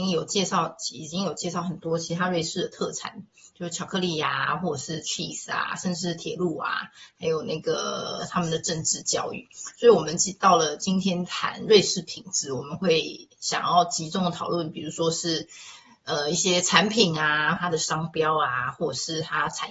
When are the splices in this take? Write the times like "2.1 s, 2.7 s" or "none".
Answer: 17.6 s

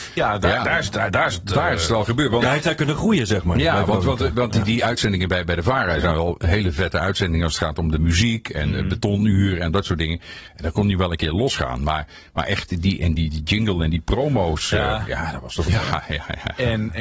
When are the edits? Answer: 13.2 s, 15.7 s

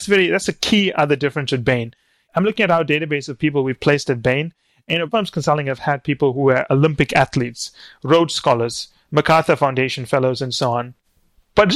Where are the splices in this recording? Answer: none

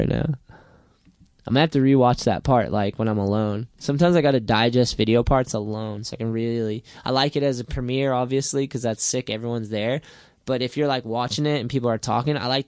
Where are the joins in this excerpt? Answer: none

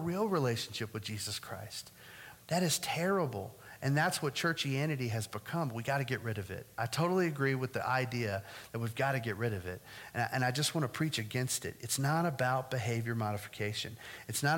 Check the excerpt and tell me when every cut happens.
2.3 s

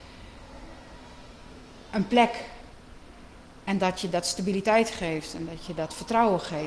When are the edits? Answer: none

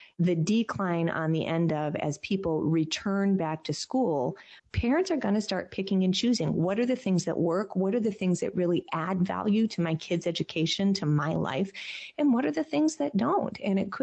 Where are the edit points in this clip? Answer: 4.6 s

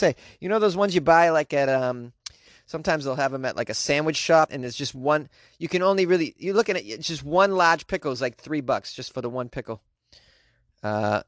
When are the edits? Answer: 4.5 s

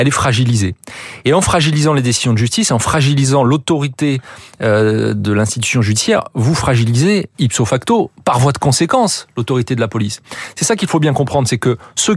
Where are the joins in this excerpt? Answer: 7.3 s

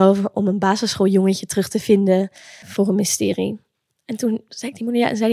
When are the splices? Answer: 2.6 s

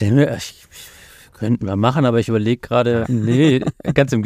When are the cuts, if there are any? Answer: 3.0 s

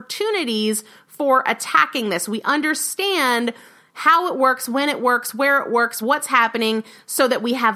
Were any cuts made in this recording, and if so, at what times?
none

